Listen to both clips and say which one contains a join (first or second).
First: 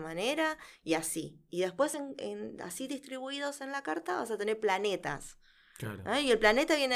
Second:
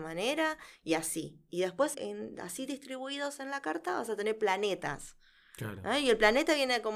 second